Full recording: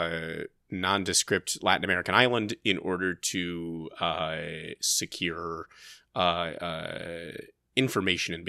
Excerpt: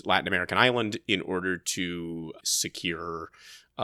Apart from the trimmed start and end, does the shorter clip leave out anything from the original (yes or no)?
yes